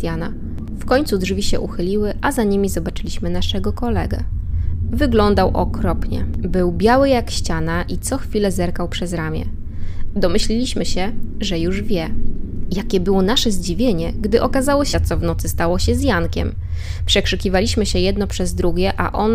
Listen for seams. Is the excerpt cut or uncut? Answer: cut